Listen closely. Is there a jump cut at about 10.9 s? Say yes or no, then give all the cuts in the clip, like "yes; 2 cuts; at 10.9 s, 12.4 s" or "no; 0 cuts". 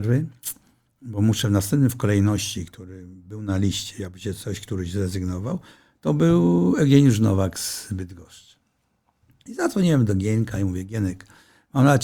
no; 0 cuts